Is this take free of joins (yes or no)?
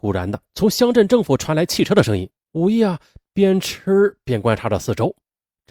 no